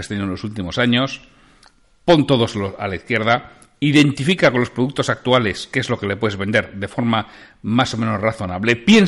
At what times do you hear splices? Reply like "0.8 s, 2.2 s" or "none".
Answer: none